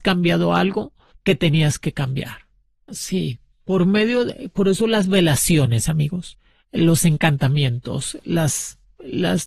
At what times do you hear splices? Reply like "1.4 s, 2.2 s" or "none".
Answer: 2.9 s